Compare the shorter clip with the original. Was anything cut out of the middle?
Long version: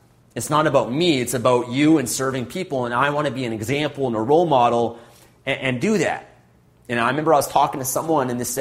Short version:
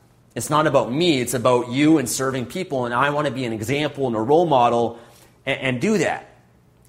no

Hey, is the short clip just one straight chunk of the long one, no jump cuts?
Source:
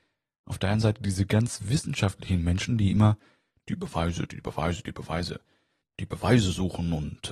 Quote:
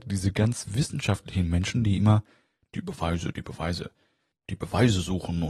no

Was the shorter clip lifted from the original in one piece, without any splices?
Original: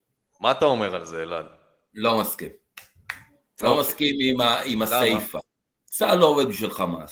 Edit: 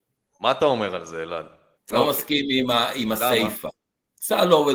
no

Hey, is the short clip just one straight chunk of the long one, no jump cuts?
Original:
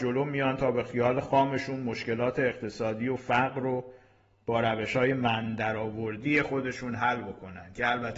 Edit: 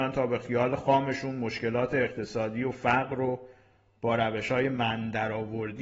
yes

